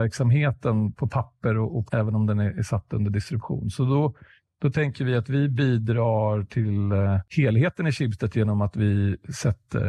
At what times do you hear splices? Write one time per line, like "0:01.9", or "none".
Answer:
0:01.9